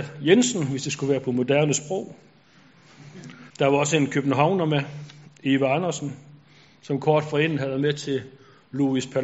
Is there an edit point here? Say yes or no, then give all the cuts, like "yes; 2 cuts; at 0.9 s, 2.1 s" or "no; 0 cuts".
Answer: yes; 1 cut; at 3.5 s